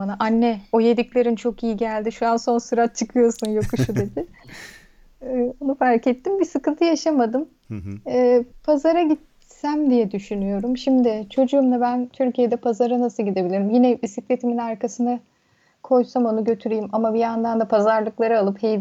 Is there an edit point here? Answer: no; 0 cuts

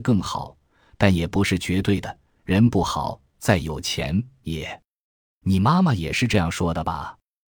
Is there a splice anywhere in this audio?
no; 0 cuts

